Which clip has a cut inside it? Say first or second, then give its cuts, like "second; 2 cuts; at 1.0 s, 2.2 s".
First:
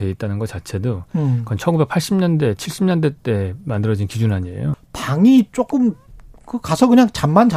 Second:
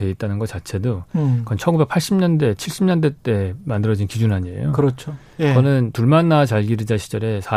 first; 1 cut; at 4.7 s